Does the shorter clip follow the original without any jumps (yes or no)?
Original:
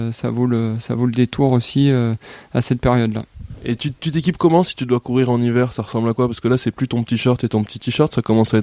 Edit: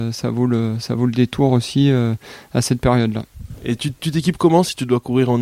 yes